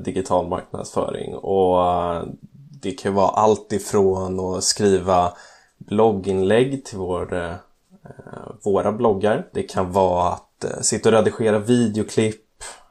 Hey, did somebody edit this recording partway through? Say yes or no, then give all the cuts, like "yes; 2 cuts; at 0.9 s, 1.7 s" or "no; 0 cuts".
yes; 1 cut; at 9.5 s